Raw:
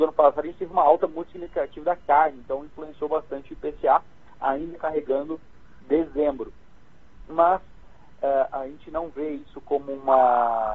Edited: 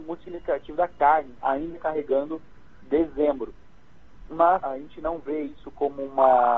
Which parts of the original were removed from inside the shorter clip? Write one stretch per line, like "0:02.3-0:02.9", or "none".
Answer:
0:02.4-0:04.4
0:07.6-0:08.5